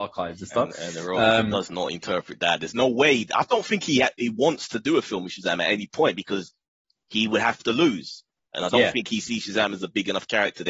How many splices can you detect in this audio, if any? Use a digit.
0